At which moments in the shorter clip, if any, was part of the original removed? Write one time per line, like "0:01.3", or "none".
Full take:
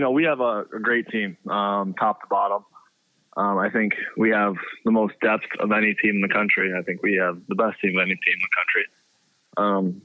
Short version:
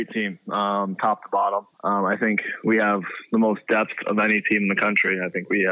0:01.7